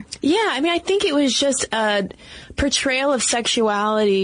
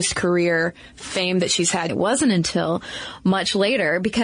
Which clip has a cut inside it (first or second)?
second